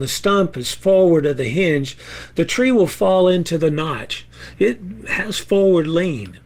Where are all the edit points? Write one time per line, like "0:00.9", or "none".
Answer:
none